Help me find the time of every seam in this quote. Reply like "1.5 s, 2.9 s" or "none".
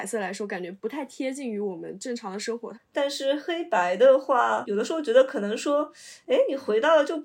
2.7 s, 4.6 s